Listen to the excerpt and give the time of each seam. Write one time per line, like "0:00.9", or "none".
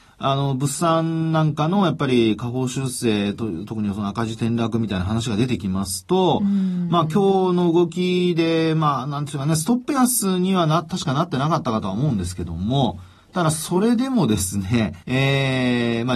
0:15.0